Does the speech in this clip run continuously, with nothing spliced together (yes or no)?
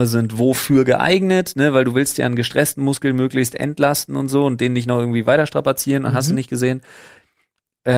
yes